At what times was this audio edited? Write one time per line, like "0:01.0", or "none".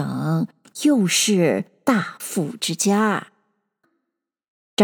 0:03.8